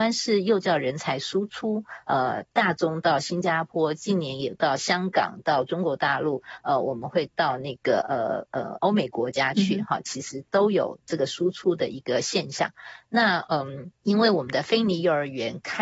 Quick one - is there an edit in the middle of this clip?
yes; 1 cut; at 14.0 s

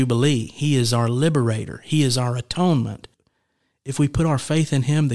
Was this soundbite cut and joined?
no; 0 cuts

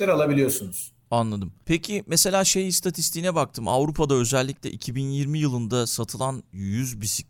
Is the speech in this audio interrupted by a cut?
no; 0 cuts

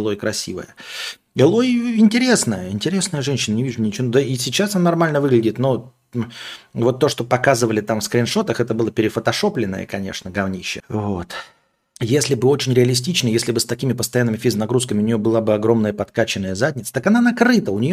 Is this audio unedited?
no; 1 cut; at 10.8 s

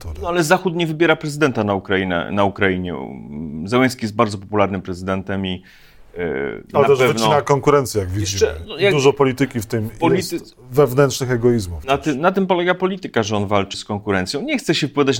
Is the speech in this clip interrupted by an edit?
yes; 1 cut; at 13.7 s

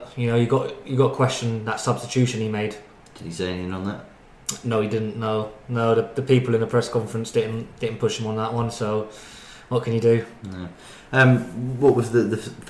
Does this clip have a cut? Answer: no; 0 cuts

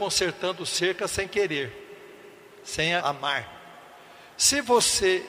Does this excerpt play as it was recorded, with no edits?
no; 1 cut; at 3.0 s

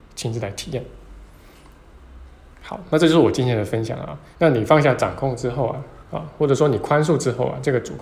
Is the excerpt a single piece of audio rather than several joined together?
no; 2 cuts; at 4.3 s, 6.0 s

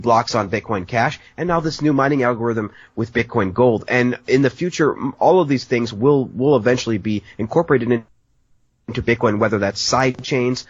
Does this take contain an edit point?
no; 0 cuts

